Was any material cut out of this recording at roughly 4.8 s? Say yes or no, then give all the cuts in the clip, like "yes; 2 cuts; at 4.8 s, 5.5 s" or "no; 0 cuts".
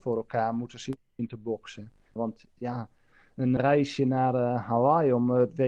no; 2 cuts; at 2.2 s, 3.6 s